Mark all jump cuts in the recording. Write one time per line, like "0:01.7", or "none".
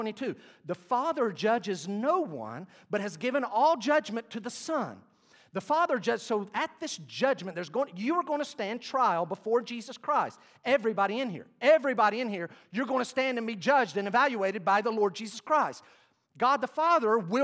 none